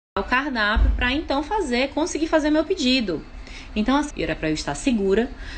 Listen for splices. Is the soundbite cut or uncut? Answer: cut